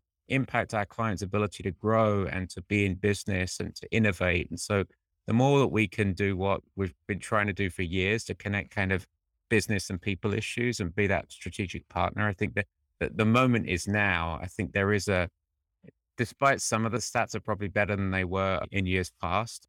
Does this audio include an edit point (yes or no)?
no